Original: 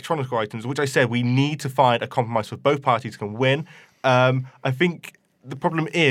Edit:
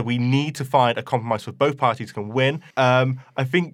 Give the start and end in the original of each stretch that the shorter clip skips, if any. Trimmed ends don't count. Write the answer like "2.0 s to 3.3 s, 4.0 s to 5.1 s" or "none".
3.7 s to 4.0 s